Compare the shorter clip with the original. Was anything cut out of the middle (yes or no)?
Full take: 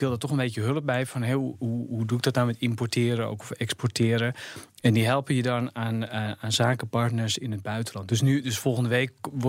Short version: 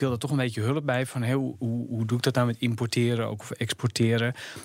no